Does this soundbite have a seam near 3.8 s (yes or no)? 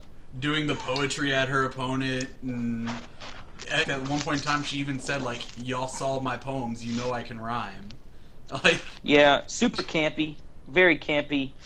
yes